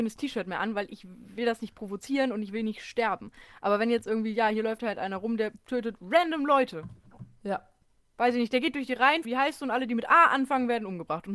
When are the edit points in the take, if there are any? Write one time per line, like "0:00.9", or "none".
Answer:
0:09.2